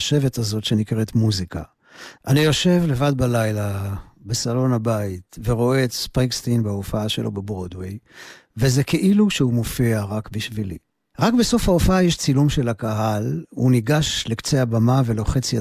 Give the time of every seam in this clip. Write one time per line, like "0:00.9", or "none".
0:02.1
0:11.1